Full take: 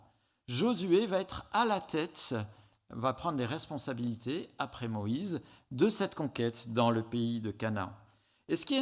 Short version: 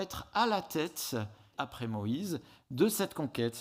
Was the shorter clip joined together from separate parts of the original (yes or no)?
yes